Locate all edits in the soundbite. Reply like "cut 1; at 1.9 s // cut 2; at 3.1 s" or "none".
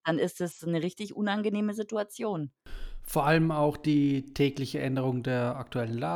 none